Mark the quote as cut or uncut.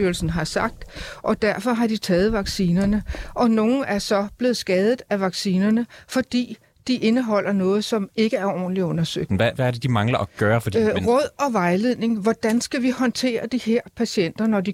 cut